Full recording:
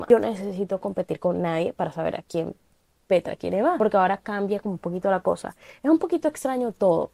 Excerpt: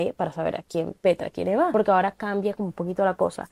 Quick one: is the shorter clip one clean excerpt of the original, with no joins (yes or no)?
no